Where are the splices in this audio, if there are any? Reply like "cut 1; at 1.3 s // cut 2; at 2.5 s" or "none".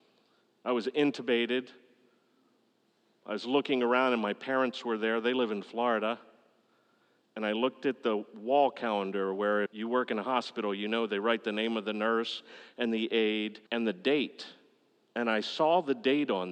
cut 1; at 9.7 s // cut 2; at 13.7 s